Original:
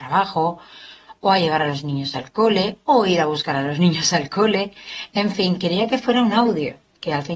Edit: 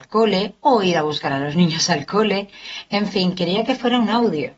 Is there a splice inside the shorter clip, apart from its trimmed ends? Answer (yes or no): no